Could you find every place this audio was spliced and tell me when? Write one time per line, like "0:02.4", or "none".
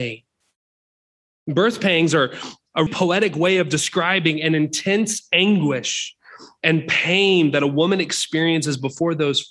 0:01.3
0:02.9